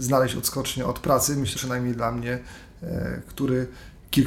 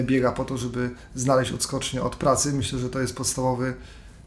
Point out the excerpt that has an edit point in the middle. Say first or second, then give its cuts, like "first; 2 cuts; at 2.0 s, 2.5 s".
first; 1 cut; at 1.5 s